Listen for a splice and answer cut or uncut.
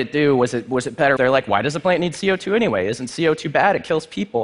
cut